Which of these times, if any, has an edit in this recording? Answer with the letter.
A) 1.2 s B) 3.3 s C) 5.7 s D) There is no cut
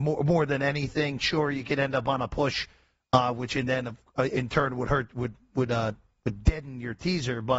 D